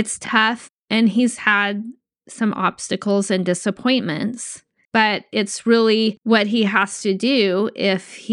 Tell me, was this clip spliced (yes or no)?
yes